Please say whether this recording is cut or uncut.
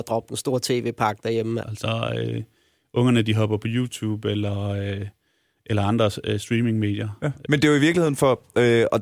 cut